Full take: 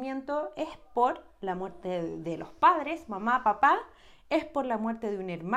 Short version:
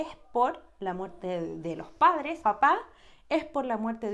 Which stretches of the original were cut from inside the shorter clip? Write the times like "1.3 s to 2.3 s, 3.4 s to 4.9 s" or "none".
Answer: 3.0 s to 3.4 s

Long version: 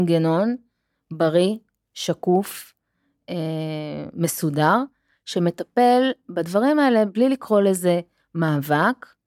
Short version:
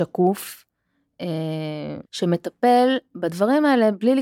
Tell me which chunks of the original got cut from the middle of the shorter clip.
4.1 s to 5.2 s

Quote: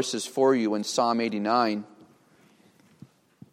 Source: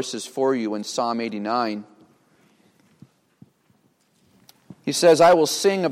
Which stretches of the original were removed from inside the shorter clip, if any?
none

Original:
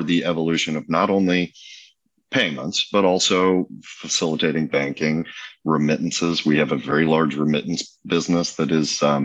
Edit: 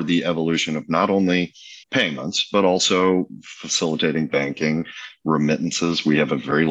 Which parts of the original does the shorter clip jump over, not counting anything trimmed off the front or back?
1.8 s to 2.2 s

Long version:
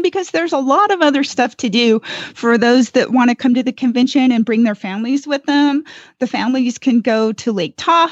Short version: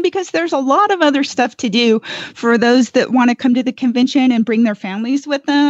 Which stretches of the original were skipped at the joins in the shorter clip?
none

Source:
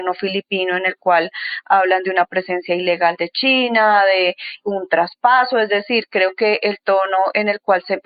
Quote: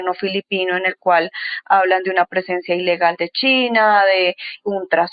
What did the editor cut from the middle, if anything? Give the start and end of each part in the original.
none

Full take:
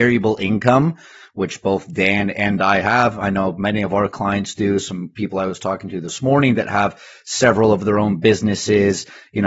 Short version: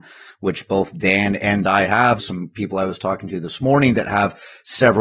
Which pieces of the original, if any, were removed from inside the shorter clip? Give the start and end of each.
3.1 s to 4.8 s

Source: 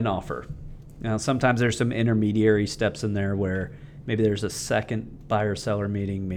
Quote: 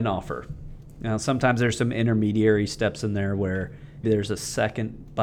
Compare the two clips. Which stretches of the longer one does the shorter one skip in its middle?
4.0 s to 4.2 s

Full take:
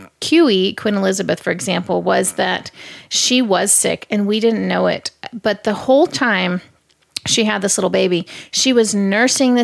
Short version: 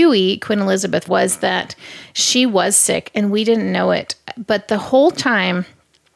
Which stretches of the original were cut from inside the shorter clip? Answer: 1.4 s to 2.0 s

